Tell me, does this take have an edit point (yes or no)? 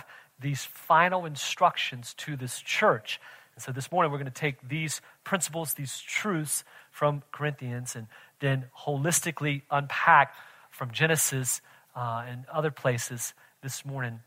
no